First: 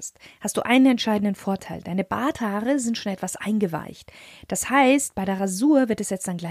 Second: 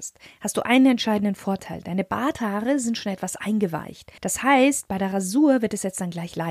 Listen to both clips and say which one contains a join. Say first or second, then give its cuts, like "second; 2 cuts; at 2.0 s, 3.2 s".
second; 1 cut; at 4.2 s